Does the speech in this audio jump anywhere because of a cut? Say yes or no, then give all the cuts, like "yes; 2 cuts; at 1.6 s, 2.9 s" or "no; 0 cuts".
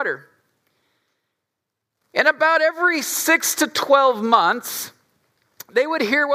no; 0 cuts